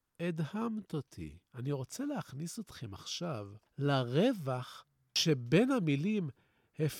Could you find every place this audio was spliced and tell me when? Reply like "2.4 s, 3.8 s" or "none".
none